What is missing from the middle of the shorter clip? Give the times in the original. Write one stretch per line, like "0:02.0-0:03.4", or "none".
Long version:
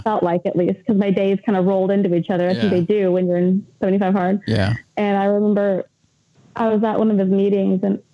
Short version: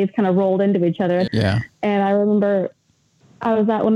0:02.6-0:04.4